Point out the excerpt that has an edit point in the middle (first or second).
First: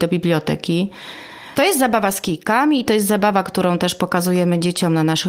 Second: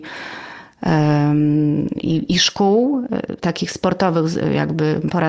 first